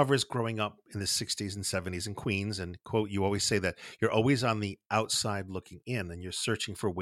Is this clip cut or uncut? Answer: uncut